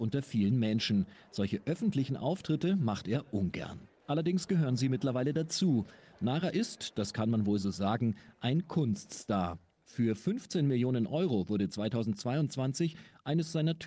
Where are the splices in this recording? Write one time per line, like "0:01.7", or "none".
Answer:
none